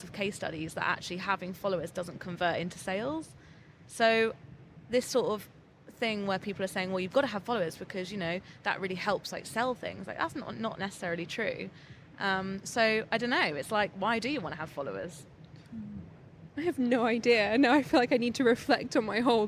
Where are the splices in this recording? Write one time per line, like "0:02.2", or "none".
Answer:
none